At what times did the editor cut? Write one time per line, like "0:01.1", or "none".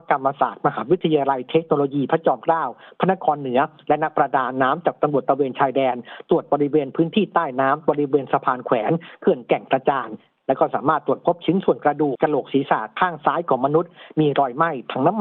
0:12.2